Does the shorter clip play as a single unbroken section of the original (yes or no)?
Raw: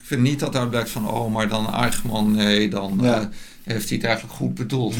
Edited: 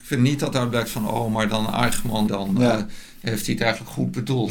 no